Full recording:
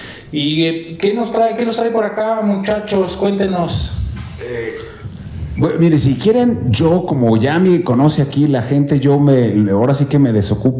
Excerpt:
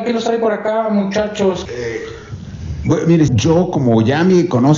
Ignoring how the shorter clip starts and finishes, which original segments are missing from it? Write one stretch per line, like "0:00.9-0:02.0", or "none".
0:03.2-0:04.4
0:06.0-0:06.6